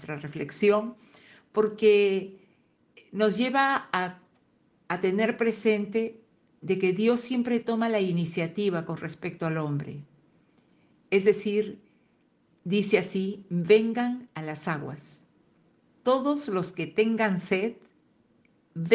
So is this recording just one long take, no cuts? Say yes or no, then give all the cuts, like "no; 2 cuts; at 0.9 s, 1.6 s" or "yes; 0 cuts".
yes; 0 cuts